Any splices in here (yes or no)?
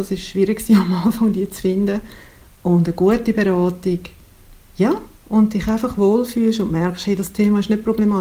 no